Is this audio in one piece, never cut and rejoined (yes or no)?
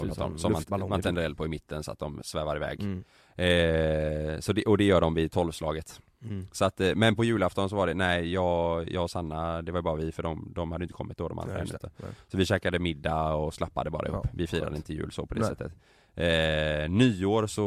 no